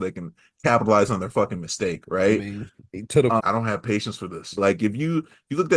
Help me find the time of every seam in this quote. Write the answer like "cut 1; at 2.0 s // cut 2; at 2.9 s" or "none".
cut 1; at 3.4 s // cut 2; at 4.6 s